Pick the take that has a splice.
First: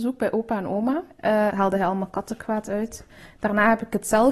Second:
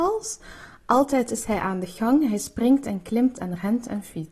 first; 1 cut; at 1.5 s

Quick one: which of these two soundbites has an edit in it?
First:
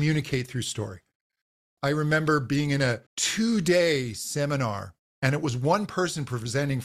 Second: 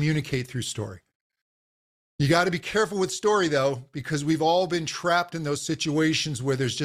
first; 2 cuts; at 1.8 s, 3.1 s

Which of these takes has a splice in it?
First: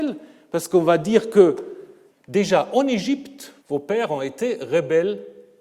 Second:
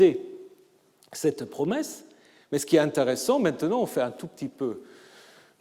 first; 2 cuts; at 2.1 s, 3.6 s

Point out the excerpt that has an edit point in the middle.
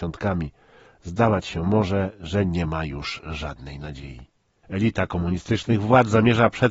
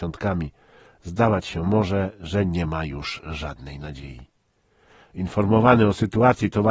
first; 1 cut; at 4.6 s

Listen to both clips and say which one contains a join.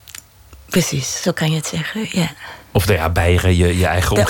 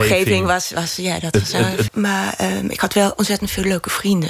second; 1 cut; at 1.9 s

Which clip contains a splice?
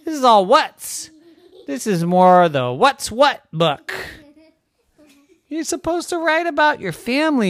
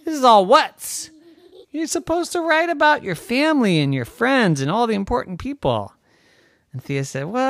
second; 1 cut; at 1.6 s

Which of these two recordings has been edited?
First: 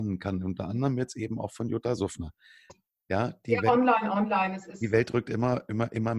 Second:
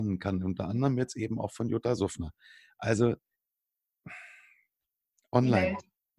first; 1 cut; at 2.7 s

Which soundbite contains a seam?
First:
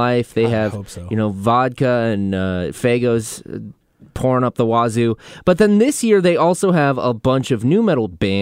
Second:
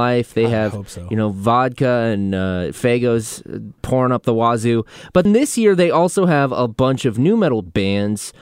second; 2 cuts; at 3.8 s, 5.3 s

